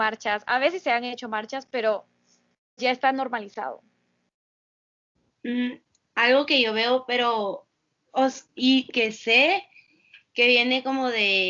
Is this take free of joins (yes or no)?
no